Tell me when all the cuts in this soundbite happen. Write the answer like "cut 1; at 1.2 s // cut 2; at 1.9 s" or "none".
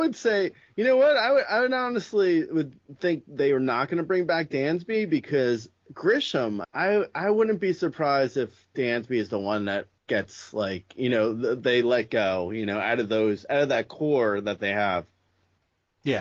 cut 1; at 6.6 s // cut 2; at 10.0 s